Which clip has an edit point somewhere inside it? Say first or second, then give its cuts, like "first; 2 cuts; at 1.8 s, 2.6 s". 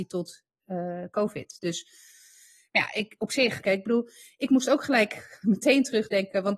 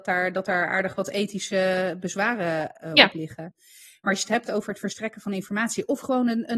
first; 1 cut; at 3.6 s